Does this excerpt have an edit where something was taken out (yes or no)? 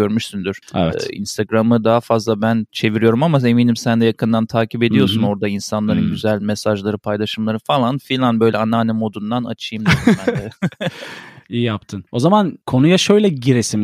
no